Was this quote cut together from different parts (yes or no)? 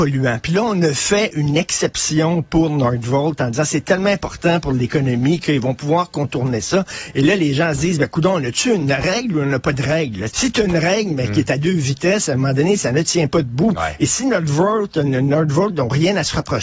yes